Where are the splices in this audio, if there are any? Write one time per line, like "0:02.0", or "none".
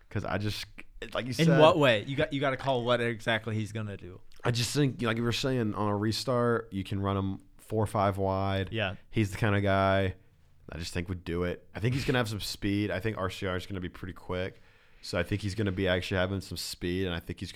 none